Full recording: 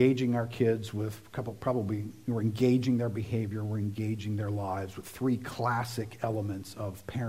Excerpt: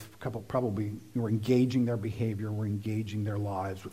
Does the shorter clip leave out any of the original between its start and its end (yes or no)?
no